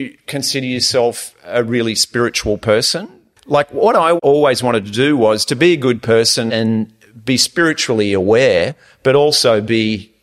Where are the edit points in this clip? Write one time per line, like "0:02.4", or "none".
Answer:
none